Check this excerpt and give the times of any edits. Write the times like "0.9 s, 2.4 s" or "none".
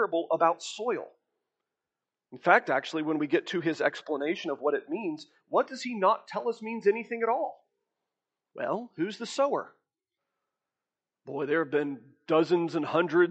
none